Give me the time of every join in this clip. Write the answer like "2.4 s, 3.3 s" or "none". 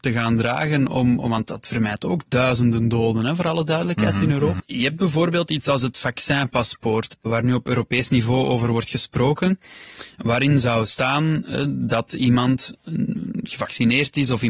4.6 s